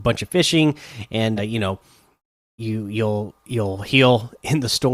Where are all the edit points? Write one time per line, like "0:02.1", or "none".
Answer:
0:01.4